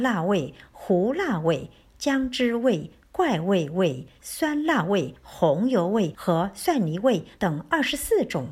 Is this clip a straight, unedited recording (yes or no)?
no